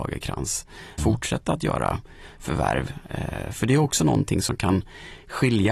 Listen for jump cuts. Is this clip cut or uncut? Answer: cut